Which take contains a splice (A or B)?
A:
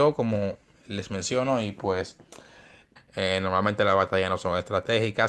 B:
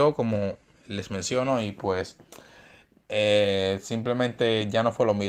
A